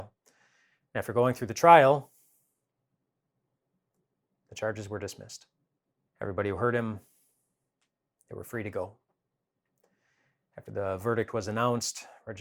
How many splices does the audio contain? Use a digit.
1